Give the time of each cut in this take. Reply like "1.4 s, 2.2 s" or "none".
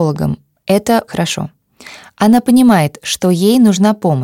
1.1 s